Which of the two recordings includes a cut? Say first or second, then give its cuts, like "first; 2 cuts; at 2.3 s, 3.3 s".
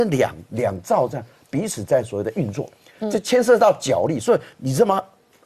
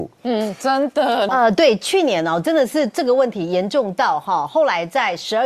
second; 1 cut; at 1.3 s